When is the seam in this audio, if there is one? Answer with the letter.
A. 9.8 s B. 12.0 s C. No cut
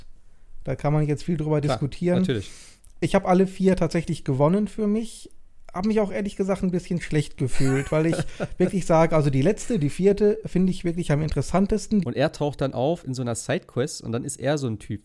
B